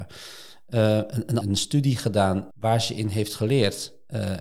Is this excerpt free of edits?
no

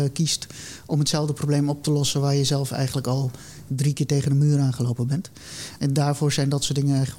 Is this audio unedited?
yes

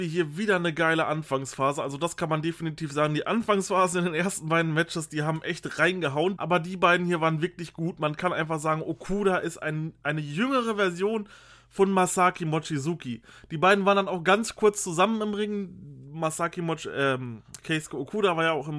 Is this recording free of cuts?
no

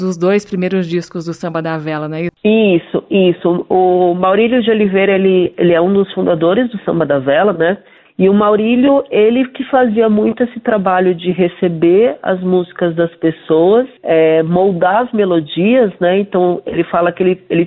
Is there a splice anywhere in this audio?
yes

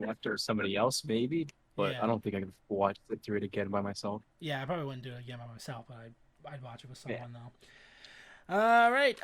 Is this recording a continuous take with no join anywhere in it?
yes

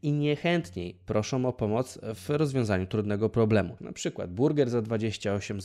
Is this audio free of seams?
no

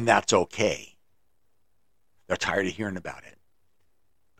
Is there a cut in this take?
yes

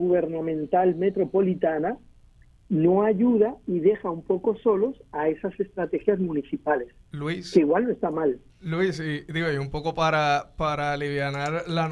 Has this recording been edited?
yes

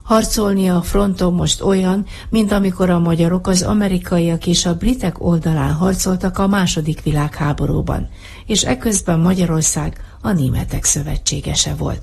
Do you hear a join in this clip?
no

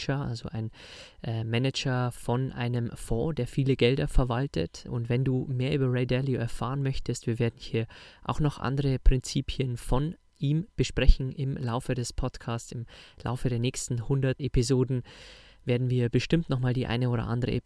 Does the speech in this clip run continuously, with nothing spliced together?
no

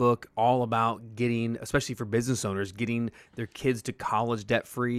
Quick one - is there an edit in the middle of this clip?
no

